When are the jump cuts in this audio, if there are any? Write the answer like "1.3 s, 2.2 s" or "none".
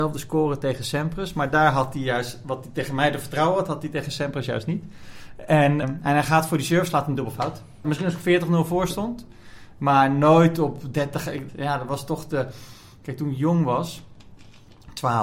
5.8 s, 7.8 s, 11.5 s